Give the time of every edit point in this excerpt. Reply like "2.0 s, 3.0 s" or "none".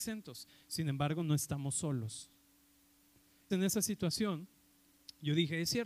3.5 s